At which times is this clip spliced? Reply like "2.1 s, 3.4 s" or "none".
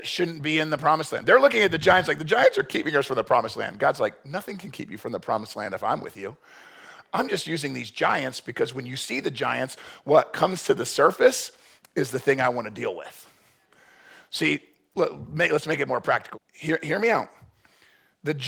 16.3 s